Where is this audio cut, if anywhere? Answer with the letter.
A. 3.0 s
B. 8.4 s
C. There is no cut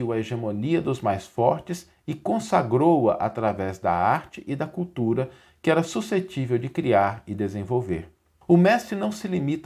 B